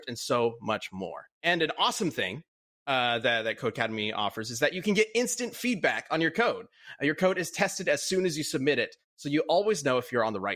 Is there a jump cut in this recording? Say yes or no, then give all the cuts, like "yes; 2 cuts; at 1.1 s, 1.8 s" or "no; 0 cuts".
yes; 1 cut; at 1.3 s